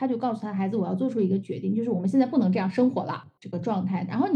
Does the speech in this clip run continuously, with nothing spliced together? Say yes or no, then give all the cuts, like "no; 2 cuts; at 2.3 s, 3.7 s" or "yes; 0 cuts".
no; 1 cut; at 3.4 s